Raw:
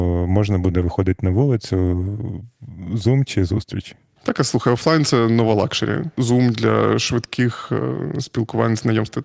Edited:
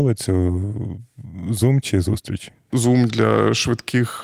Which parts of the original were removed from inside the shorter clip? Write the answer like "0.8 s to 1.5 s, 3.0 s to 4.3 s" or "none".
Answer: 4.1 s to 6.1 s